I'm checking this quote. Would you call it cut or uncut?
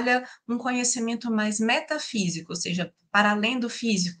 uncut